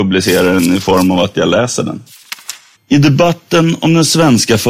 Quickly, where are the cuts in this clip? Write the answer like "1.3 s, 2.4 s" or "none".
2.7 s